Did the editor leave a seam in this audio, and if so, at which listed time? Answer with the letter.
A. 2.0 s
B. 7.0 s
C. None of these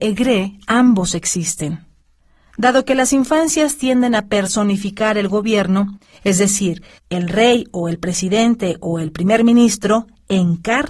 B